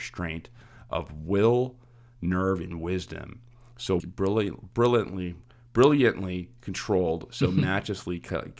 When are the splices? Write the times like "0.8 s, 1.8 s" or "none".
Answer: 4.0 s